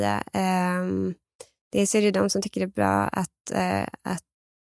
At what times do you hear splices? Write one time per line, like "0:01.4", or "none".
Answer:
none